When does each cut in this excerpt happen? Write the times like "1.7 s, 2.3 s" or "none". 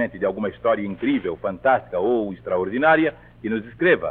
none